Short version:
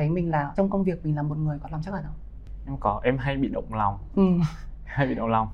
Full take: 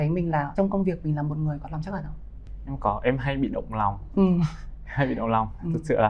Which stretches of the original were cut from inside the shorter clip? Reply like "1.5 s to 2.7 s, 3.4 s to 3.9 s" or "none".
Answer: none